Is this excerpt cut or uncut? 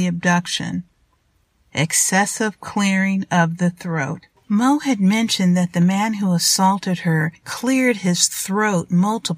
uncut